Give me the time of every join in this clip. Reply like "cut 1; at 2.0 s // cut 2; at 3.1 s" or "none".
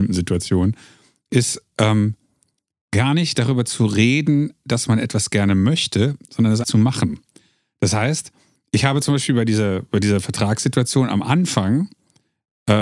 cut 1; at 6.6 s